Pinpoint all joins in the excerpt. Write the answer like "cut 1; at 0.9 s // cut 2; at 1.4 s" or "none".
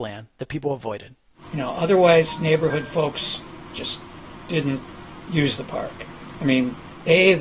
none